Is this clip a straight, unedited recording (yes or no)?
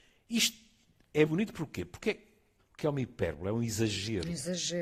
no